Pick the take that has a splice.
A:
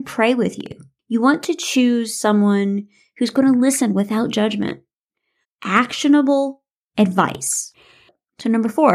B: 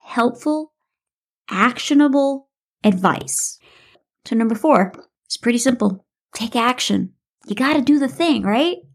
A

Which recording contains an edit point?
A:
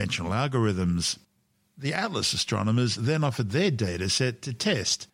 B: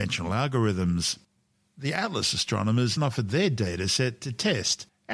B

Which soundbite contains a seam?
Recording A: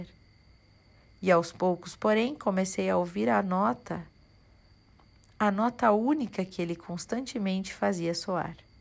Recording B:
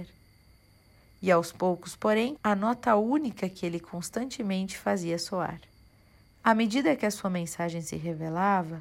B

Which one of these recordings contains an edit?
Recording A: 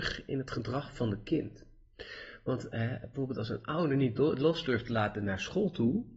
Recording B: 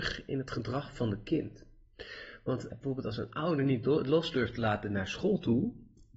B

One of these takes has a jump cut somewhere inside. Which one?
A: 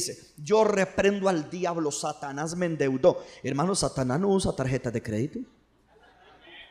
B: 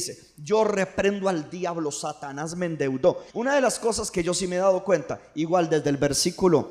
B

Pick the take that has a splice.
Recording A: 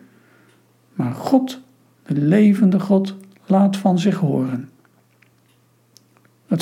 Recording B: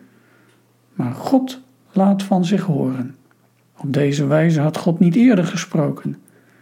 B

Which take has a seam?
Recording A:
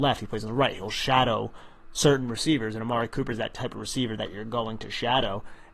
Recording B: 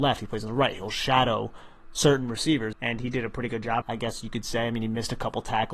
B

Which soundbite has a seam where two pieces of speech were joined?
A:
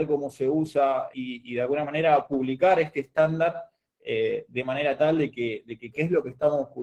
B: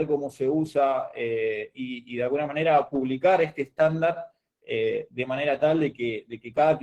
A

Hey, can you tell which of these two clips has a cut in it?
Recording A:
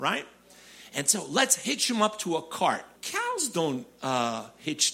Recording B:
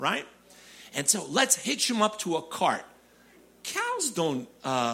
A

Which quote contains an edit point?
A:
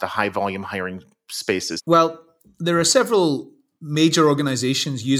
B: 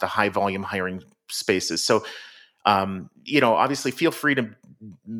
A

